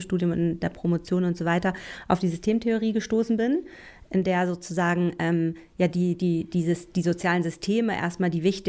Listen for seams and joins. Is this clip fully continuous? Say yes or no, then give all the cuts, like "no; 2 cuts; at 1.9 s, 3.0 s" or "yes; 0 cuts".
yes; 0 cuts